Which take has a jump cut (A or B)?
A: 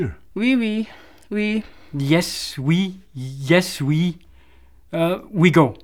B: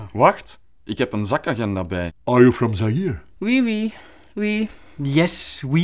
B